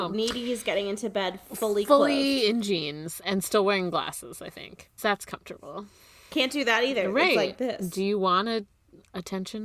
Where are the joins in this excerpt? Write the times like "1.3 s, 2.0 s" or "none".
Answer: 5.0 s